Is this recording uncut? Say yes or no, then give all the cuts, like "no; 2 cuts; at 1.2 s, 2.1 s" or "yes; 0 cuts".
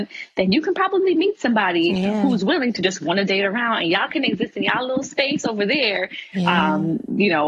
no; 1 cut; at 6.3 s